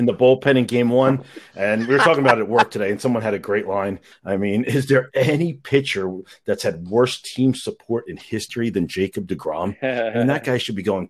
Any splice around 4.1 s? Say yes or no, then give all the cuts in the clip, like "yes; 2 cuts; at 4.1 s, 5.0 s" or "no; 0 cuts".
yes; 1 cut; at 4.1 s